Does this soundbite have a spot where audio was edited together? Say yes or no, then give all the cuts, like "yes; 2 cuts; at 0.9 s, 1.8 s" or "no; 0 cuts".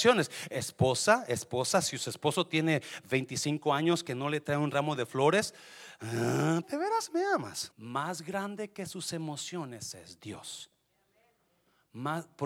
yes; 2 cuts; at 6.6 s, 7.7 s